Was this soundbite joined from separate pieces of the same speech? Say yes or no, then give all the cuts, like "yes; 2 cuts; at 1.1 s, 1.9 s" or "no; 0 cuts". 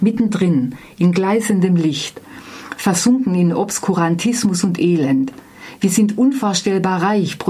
no; 0 cuts